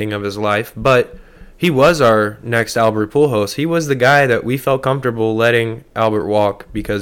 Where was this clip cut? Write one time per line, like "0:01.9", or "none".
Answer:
none